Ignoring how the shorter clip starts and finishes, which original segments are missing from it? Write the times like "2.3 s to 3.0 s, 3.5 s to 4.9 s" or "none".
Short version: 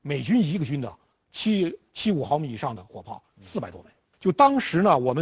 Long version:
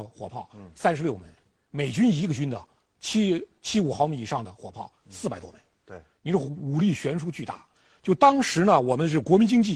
5.8 s to 8.0 s